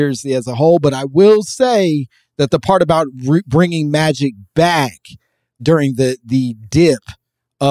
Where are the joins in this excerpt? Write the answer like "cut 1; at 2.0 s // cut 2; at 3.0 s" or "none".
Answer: none